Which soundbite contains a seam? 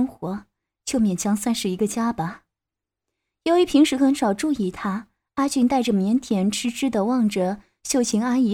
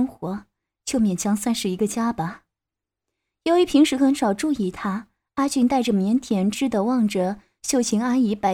second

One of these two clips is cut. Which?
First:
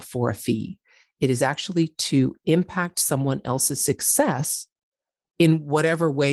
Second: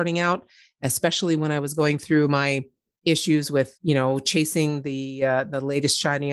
second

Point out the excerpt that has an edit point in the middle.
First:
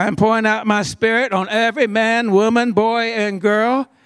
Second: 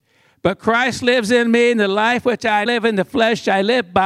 second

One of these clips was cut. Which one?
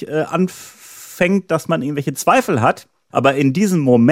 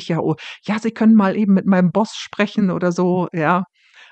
first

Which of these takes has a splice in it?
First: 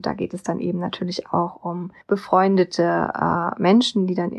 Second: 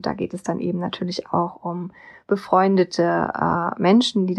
first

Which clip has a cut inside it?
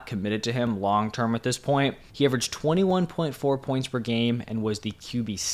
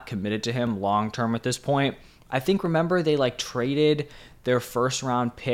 first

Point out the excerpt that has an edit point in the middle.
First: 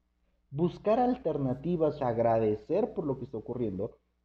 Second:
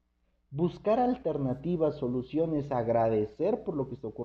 first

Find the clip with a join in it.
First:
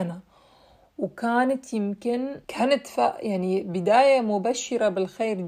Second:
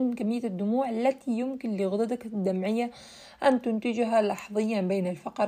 first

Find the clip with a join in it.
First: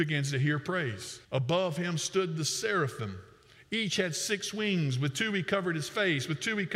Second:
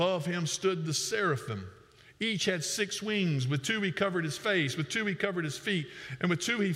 first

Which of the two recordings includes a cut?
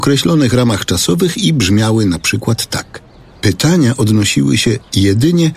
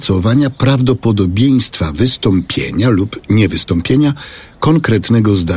first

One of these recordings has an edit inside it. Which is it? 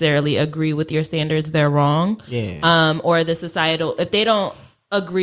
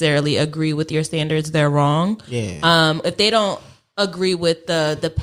second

